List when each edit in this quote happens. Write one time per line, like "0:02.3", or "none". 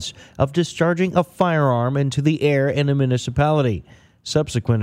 none